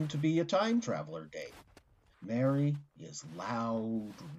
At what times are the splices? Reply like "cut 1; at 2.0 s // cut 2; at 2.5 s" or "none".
cut 1; at 2.1 s